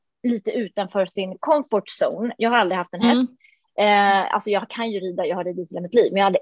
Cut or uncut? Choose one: uncut